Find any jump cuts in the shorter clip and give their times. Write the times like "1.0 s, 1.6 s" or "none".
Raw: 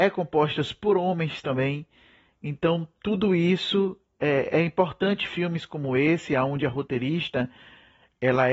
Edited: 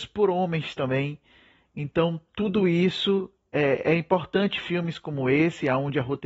none